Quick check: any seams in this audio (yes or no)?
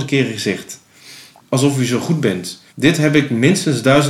yes